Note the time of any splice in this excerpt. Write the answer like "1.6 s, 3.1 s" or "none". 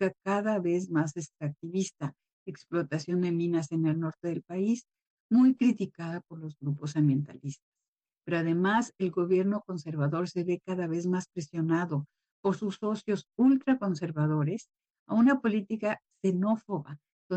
none

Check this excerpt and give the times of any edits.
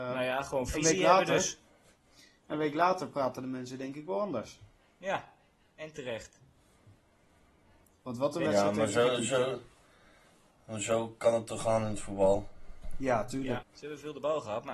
13.6 s

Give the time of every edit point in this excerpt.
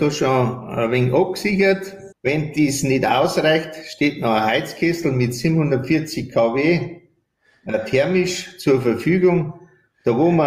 2.1 s

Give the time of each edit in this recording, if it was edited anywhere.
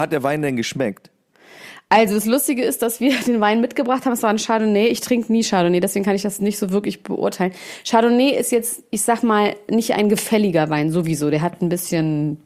none

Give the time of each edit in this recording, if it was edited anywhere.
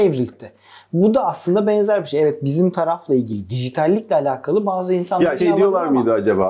5.4 s

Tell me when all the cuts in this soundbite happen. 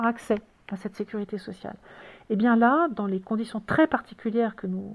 none

